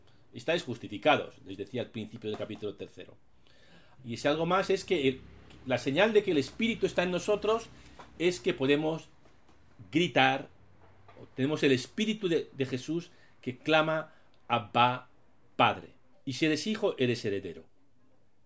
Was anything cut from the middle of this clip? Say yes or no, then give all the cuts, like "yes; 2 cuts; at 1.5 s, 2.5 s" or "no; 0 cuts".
yes; 2 cuts; at 4.0 s, 16.1 s